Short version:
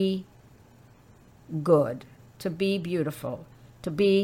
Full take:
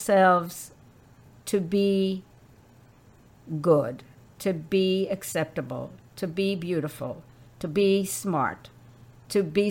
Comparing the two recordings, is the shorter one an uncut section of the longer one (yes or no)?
no